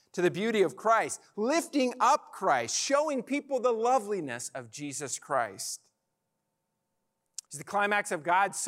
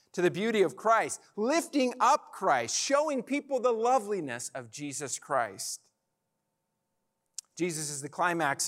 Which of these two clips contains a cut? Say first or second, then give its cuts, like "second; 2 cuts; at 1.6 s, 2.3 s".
first; 1 cut; at 7.5 s